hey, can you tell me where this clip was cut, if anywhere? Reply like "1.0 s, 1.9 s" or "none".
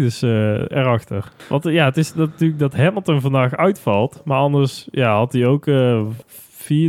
none